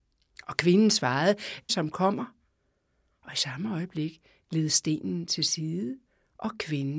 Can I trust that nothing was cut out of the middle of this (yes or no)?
no